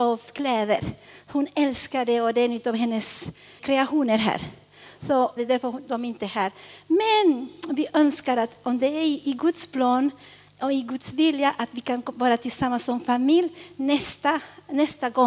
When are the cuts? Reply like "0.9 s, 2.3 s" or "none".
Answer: 3.6 s, 5.4 s

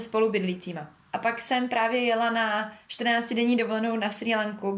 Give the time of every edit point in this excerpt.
1.1 s

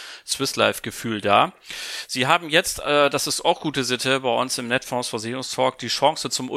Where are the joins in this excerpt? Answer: none

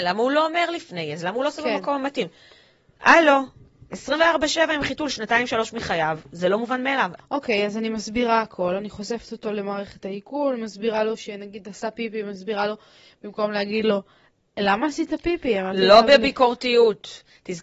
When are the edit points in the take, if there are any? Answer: 7.2 s

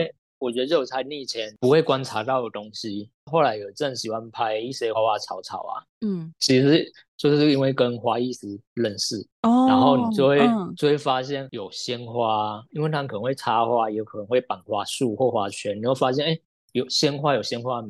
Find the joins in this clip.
4.9 s, 9.3 s

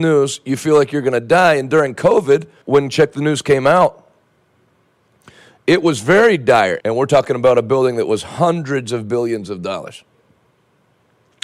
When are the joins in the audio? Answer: 2.6 s, 6.8 s

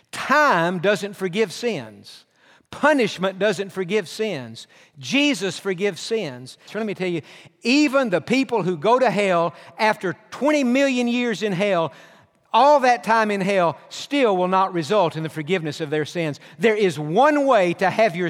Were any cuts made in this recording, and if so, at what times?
6.7 s

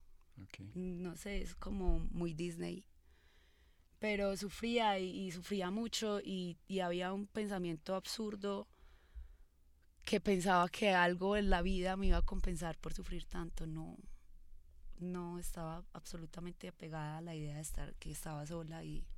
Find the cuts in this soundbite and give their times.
none

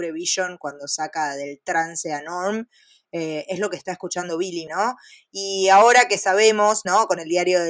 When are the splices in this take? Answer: 4.7 s

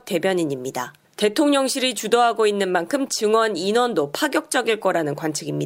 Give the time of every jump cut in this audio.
1.0 s

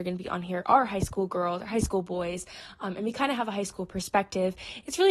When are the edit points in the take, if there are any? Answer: none

